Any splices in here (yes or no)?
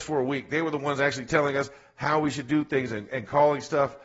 no